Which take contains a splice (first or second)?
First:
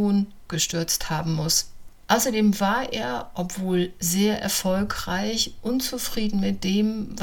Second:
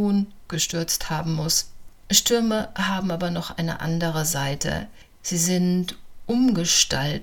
second